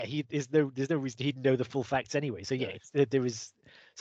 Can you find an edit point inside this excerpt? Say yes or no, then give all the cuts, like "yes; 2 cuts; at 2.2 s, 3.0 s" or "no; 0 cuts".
no; 0 cuts